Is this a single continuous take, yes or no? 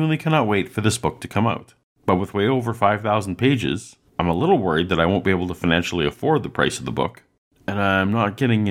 yes